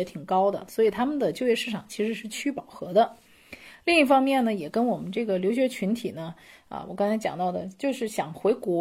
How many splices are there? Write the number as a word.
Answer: zero